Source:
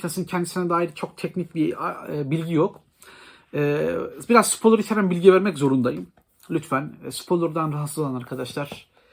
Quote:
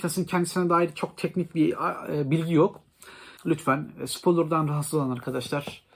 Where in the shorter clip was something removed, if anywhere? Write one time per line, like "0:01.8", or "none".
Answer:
0:03.4